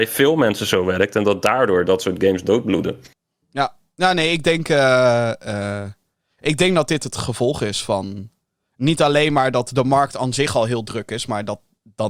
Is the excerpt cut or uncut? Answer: uncut